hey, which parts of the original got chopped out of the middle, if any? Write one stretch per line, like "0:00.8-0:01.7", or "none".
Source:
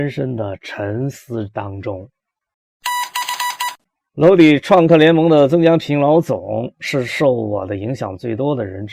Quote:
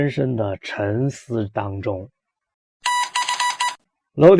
none